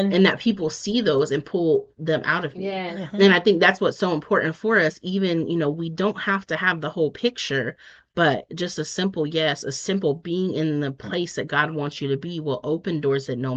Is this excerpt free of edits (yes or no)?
yes